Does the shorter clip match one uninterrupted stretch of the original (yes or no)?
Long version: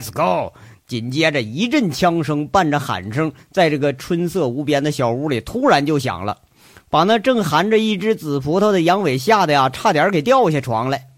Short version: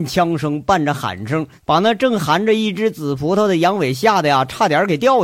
no